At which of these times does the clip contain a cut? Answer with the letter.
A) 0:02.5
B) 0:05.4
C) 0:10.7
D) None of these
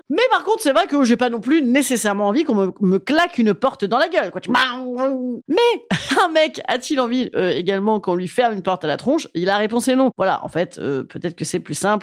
B